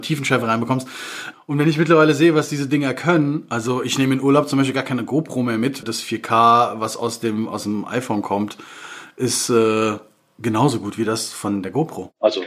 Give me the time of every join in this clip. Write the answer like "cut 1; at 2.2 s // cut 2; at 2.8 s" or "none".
cut 1; at 1.3 s // cut 2; at 5.8 s